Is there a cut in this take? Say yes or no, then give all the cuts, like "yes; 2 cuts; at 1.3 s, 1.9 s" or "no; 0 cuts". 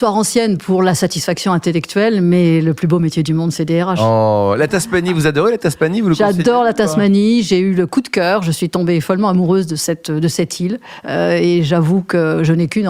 no; 0 cuts